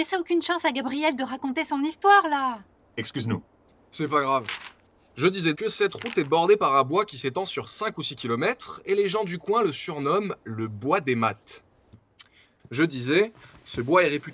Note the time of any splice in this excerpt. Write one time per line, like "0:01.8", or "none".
0:05.5
0:11.9